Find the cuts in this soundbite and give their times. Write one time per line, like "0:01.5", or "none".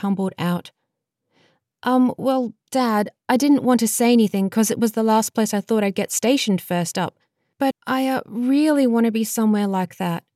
0:07.7